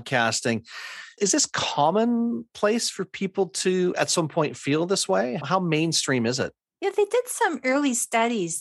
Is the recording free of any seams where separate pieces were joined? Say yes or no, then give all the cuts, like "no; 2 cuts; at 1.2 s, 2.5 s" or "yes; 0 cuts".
yes; 0 cuts